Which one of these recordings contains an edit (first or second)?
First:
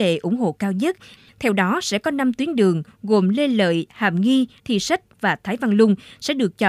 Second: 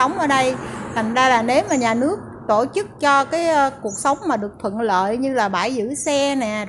first